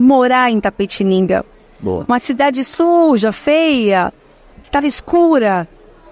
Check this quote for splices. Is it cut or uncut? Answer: cut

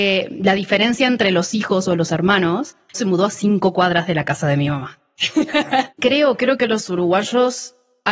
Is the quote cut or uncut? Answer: cut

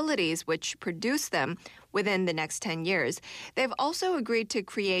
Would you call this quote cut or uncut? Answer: uncut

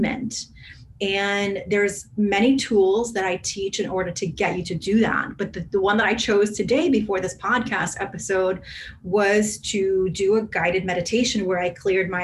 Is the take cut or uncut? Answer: uncut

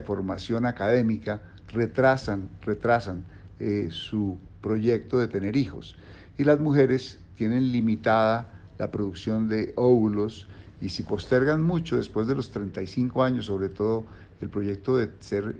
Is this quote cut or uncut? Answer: uncut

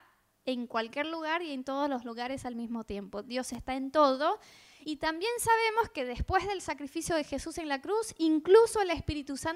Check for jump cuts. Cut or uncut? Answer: uncut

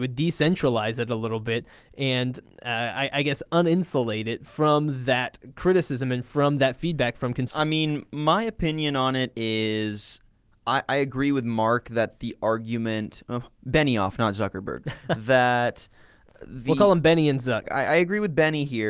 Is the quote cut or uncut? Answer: cut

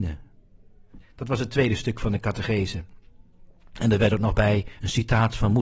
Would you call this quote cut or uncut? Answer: cut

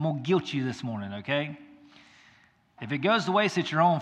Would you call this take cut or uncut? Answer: cut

